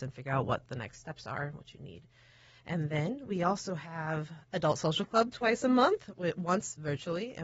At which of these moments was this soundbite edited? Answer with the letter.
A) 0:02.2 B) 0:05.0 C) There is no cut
C